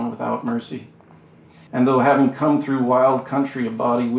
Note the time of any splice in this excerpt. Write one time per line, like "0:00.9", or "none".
0:01.7